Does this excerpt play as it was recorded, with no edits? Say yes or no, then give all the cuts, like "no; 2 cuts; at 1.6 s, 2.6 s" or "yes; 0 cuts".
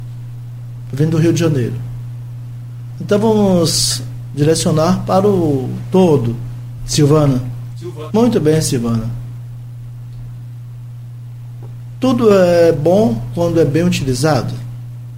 no; 3 cuts; at 3.0 s, 6.8 s, 8.1 s